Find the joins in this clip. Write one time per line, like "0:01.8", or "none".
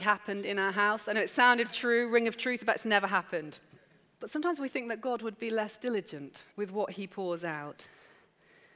0:01.7
0:04.1
0:06.5